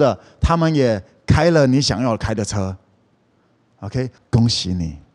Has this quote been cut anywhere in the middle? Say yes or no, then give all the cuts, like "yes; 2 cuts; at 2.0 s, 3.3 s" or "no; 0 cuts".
yes; 1 cut; at 4.2 s